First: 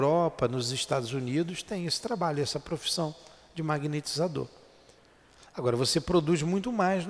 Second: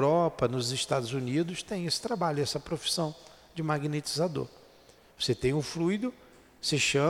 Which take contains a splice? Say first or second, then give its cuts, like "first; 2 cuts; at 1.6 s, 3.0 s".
second; 1 cut; at 5.0 s